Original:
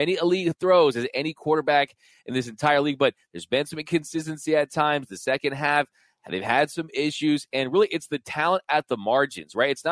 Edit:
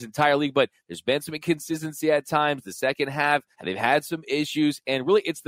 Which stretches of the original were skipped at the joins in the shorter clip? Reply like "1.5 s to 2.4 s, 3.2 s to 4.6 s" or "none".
6.0 s to 6.2 s